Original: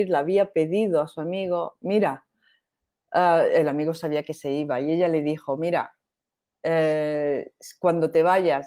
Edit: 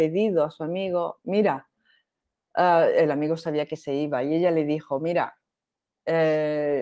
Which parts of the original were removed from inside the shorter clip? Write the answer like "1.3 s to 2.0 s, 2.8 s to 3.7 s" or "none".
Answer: none

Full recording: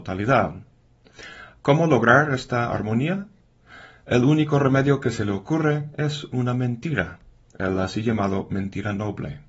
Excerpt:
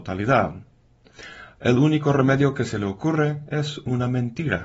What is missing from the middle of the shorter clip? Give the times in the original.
1.5 s to 4.0 s

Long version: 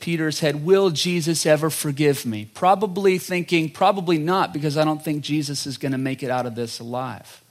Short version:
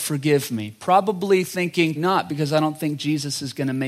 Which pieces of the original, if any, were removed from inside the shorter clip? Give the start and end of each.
3.7 s to 4.2 s

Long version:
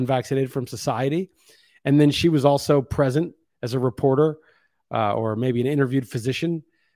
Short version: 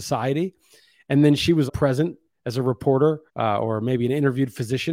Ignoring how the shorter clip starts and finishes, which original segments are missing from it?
2.4 s to 2.8 s, 4.4 s to 4.8 s

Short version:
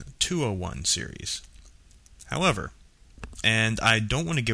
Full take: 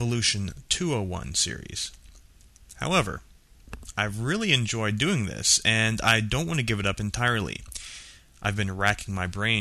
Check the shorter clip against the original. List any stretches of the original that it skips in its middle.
3.9 s to 5.6 s

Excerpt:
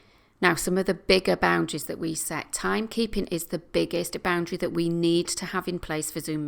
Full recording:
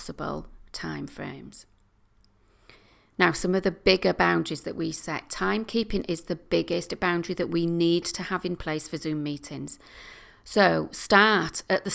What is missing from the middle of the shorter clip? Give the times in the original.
none

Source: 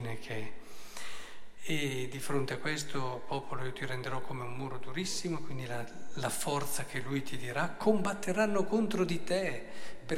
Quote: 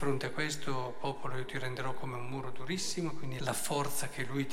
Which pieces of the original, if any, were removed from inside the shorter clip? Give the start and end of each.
5.7 s to 6.2 s

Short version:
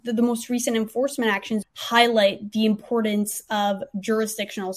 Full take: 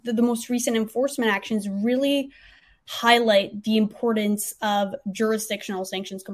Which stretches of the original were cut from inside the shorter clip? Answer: 1.6 s to 2.7 s

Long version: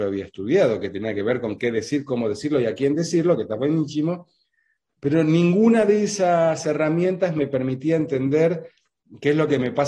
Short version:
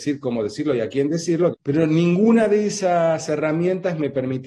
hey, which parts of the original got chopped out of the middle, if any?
3.4 s to 4.9 s

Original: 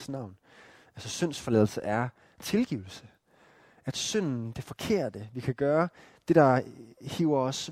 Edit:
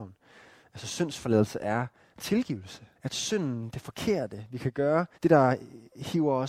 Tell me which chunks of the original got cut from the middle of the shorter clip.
3.2 s to 3.8 s, 6.0 s to 6.2 s

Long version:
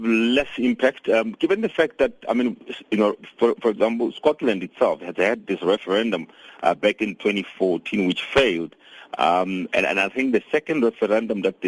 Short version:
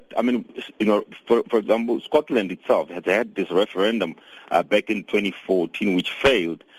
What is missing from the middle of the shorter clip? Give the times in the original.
none

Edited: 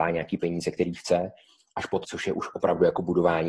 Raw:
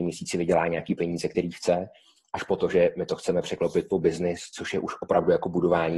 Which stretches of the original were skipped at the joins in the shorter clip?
2.6 s to 4.5 s

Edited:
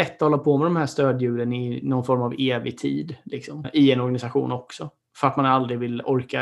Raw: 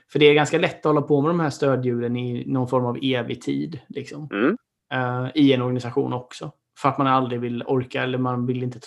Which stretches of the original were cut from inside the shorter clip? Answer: 4.3 s to 5.3 s

